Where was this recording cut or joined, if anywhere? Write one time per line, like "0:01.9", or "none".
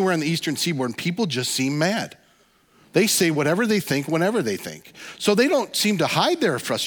none